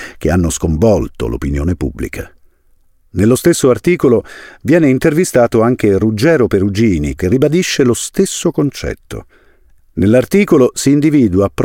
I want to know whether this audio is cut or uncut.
cut